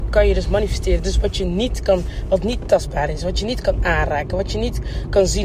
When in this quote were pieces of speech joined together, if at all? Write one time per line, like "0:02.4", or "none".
none